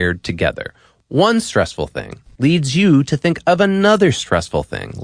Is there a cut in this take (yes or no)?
yes